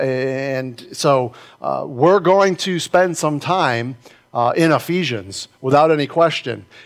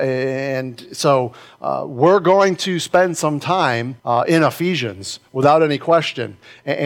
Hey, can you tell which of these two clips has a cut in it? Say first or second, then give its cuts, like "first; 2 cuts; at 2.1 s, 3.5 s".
second; 1 cut; at 4.0 s